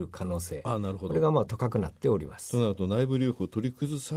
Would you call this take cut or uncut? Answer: uncut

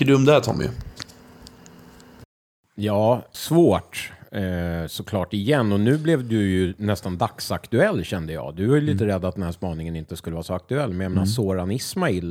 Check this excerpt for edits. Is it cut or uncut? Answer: cut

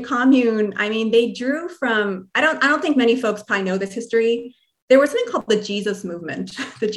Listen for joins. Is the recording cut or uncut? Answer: uncut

